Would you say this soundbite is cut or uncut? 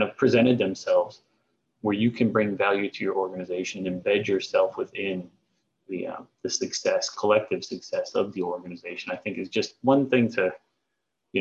uncut